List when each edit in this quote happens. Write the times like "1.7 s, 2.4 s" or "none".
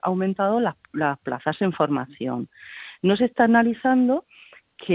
none